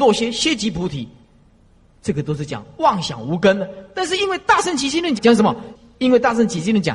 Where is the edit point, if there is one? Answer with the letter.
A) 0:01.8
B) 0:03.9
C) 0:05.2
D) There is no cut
C